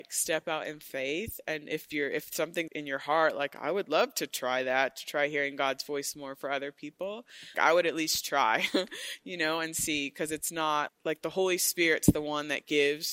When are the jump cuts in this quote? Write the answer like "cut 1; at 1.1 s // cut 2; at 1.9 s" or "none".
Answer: cut 1; at 2.7 s // cut 2; at 7.5 s // cut 3; at 10.9 s